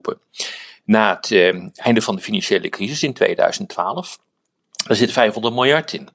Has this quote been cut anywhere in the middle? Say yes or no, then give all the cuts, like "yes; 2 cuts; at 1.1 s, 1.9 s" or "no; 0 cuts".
no; 0 cuts